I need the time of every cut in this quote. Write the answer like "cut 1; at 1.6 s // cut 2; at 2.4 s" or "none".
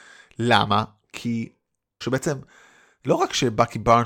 cut 1; at 2.0 s

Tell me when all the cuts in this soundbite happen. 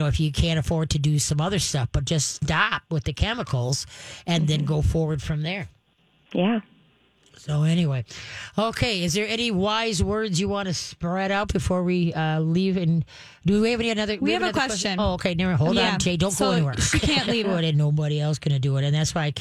cut 1; at 17.4 s

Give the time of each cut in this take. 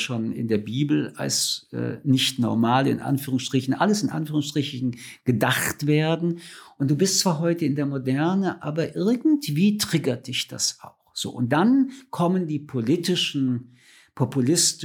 none

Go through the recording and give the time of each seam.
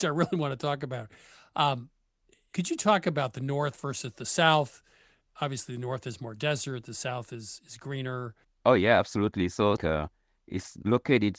cut 1; at 8.4 s // cut 2; at 9.8 s

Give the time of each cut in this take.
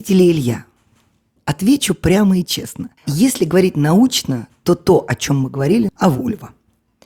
cut 1; at 3.0 s // cut 2; at 5.9 s

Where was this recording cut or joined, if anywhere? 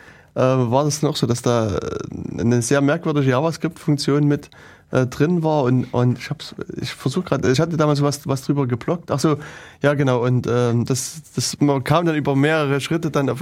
none

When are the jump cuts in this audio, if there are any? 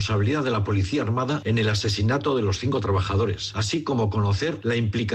cut 1; at 3.5 s

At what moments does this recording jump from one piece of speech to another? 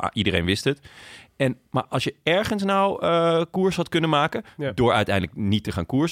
none

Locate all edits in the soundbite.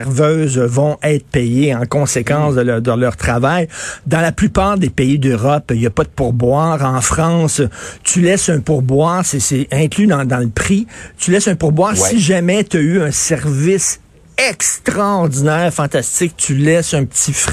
none

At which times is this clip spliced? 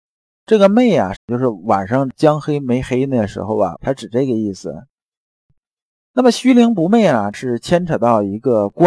cut 1; at 1.1 s // cut 2; at 3.7 s

